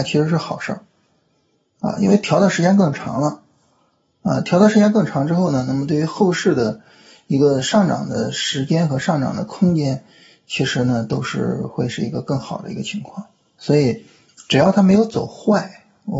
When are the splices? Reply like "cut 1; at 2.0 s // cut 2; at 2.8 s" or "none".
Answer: none

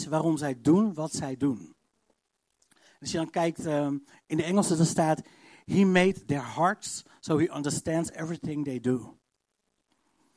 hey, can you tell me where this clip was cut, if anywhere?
none

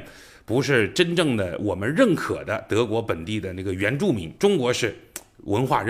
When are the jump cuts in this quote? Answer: cut 1; at 4.4 s

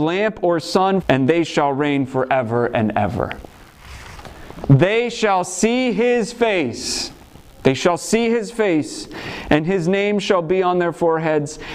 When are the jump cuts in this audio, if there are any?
cut 1; at 1.0 s // cut 2; at 4.6 s // cut 3; at 7.5 s

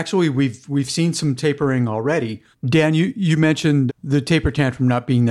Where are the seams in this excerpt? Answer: cut 1; at 2.5 s // cut 2; at 3.9 s

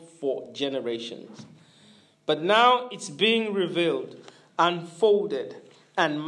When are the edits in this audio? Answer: none

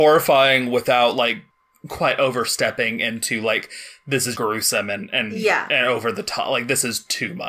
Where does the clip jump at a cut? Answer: cut 1; at 4.3 s

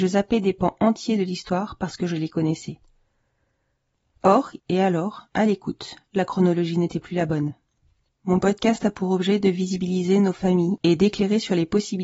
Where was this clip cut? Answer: cut 1; at 4.6 s // cut 2; at 8.1 s

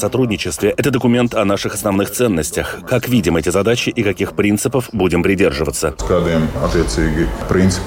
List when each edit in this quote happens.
none

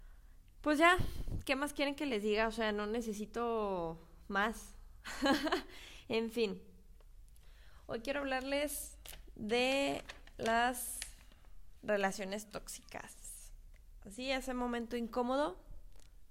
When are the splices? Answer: none

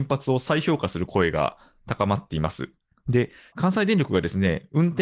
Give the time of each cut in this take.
cut 1; at 3.5 s

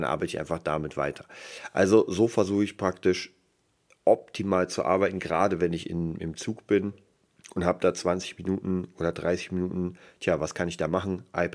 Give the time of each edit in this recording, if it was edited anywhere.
none

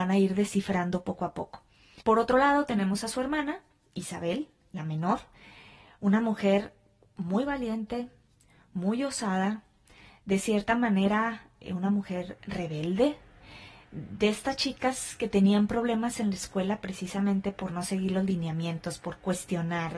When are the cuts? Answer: cut 1; at 2.0 s

